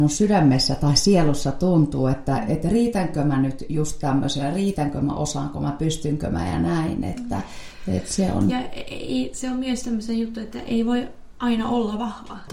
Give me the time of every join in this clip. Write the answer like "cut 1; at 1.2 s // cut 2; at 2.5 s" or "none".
none